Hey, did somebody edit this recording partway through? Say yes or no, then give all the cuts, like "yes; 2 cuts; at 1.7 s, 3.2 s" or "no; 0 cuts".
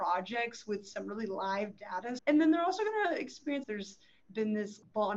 yes; 2 cuts; at 2.2 s, 3.6 s